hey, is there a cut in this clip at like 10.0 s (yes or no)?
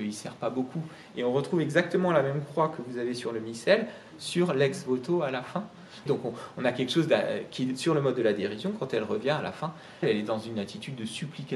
yes